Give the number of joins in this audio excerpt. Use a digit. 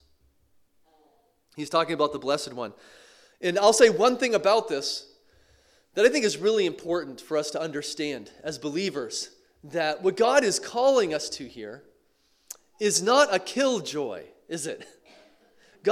0